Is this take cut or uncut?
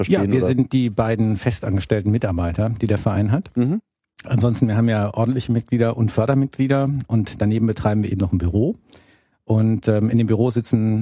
uncut